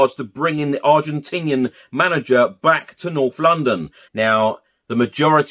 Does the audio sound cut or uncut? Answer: cut